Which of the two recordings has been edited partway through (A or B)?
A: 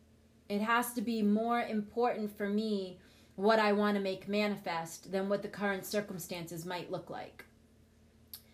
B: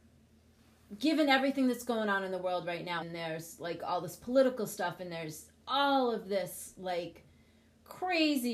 B